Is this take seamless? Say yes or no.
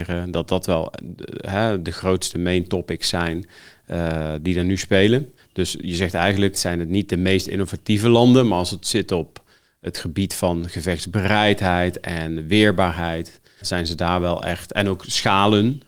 no